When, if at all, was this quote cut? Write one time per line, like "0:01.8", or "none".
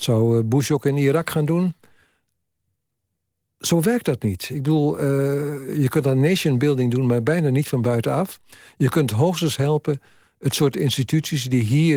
none